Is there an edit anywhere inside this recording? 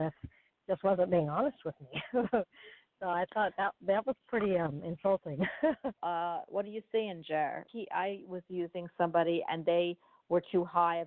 yes; 2 cuts; at 6.0 s, 7.7 s

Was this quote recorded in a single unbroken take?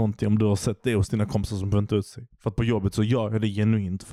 yes; 0 cuts

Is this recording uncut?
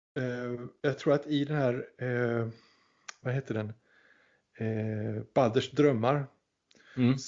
yes; 0 cuts

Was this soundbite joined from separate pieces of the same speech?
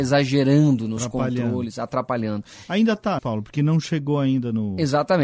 yes; 1 cut; at 3.2 s

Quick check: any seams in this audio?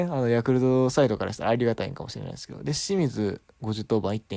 no; 0 cuts

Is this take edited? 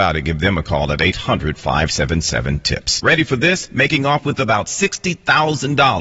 yes; 1 cut; at 3.0 s

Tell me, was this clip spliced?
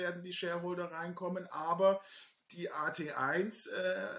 no; 0 cuts

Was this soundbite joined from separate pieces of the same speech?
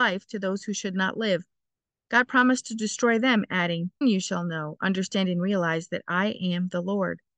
yes; 1 cut; at 4.0 s

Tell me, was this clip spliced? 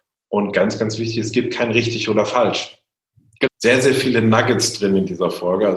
yes; 1 cut; at 3.5 s

